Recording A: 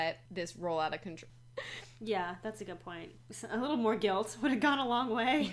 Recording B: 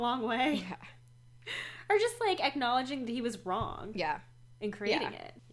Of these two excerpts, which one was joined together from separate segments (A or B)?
A